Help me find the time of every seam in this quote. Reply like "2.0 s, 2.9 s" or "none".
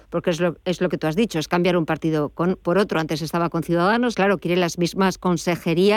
4.1 s